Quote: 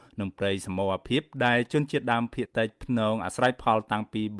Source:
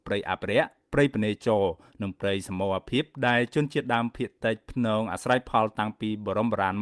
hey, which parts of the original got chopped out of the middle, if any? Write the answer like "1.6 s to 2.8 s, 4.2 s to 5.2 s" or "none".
4.3 s to 4.3 s